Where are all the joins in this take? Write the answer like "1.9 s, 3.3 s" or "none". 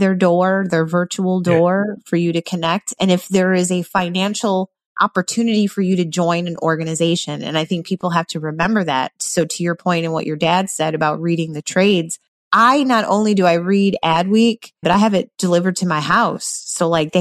14.8 s